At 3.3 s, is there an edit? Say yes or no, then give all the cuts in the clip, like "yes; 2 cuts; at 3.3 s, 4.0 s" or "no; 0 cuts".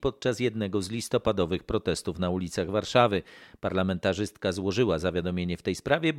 no; 0 cuts